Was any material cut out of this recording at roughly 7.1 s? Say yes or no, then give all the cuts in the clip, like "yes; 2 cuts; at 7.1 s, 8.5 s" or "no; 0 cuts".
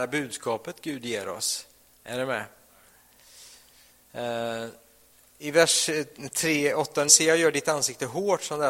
yes; 1 cut; at 7.1 s